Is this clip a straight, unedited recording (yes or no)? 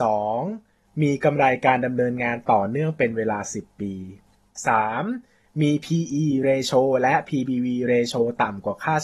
no